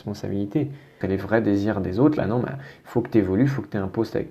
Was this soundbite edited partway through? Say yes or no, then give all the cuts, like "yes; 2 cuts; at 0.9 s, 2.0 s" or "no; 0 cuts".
yes; 2 cuts; at 1.0 s, 2.2 s